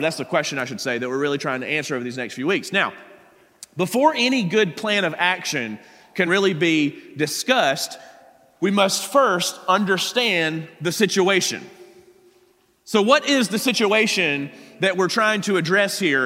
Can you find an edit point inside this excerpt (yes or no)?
no